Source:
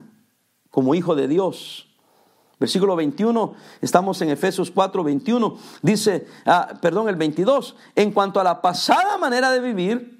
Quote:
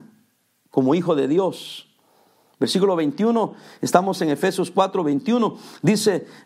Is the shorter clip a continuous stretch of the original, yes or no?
yes